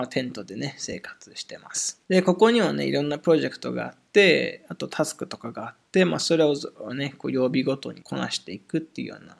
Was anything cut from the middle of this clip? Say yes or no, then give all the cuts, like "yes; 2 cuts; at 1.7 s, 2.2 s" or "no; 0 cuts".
yes; 2 cuts; at 2.0 s, 8.0 s